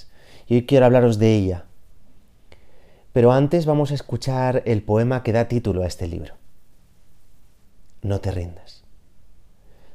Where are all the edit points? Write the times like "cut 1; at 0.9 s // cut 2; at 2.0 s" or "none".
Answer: none